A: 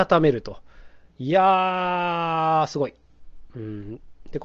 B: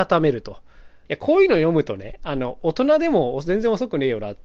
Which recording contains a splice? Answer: B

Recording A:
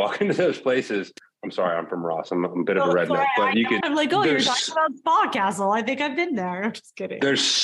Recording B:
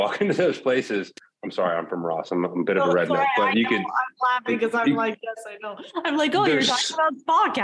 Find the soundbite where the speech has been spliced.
A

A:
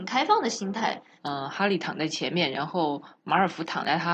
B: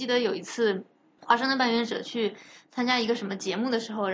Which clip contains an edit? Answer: A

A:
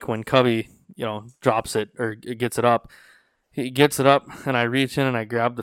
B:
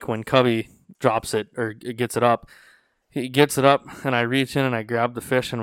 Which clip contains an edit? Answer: B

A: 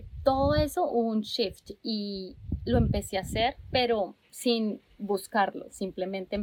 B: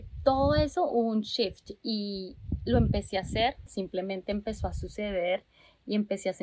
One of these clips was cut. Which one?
B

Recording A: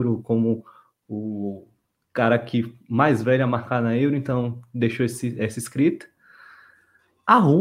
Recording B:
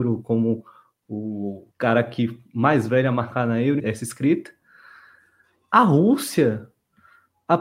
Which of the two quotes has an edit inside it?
B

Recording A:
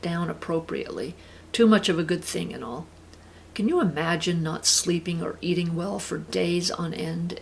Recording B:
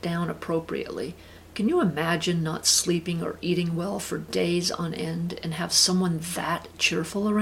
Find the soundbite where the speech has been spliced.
B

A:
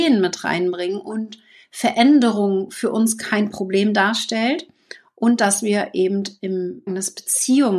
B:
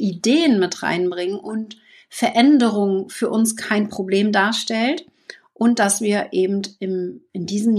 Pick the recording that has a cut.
A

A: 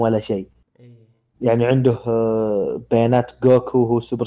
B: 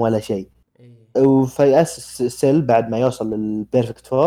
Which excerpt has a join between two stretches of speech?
B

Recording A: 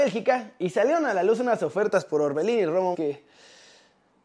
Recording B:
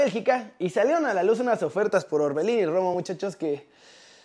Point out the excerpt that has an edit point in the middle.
A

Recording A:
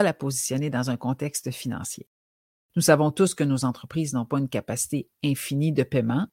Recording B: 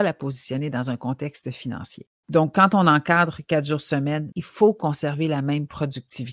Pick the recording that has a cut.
B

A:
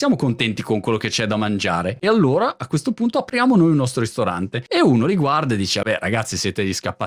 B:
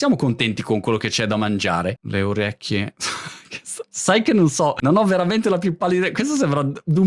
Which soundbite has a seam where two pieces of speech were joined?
B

